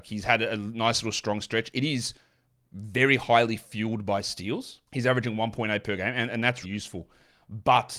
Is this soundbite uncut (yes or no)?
no